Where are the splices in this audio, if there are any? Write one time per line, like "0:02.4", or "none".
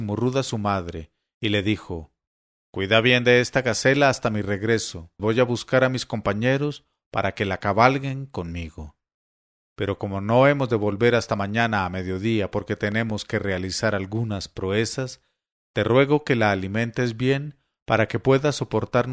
0:05.2